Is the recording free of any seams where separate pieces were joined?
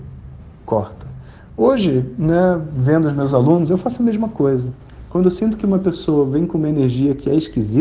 yes; 0 cuts

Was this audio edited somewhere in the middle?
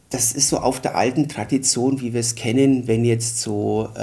no; 0 cuts

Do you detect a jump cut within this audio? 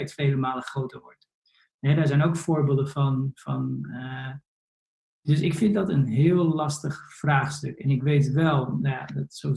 no; 0 cuts

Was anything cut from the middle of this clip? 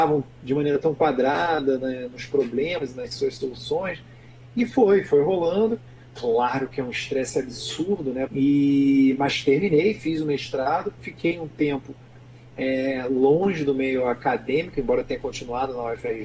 yes; 1 cut; at 8.3 s

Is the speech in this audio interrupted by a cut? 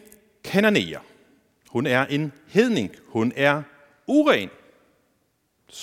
no; 0 cuts

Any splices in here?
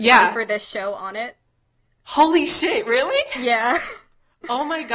no; 0 cuts

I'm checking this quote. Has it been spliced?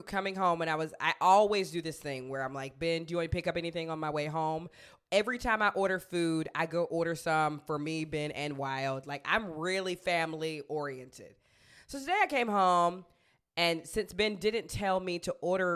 no; 0 cuts

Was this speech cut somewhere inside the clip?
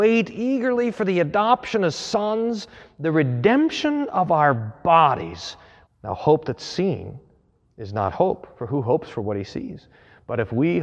yes; 1 cut; at 5.9 s

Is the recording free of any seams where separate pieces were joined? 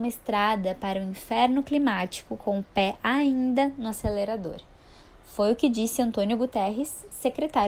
yes; 0 cuts

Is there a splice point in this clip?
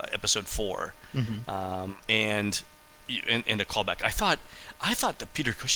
yes; 1 cut; at 2.0 s

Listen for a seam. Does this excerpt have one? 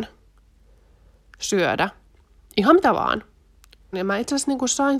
yes; 1 cut; at 3.9 s

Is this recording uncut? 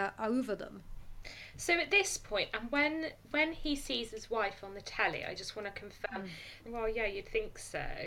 no; 1 cut; at 6.6 s

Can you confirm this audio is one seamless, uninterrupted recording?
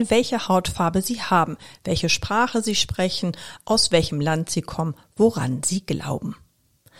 yes; 0 cuts

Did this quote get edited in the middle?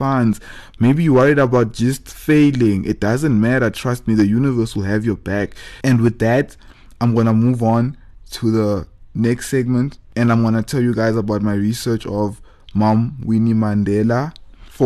yes; 1 cut; at 5.8 s

